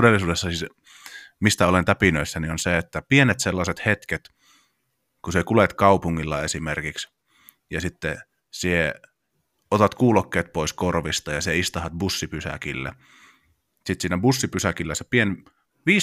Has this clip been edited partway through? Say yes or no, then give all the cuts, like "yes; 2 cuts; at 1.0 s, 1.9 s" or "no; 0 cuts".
no; 0 cuts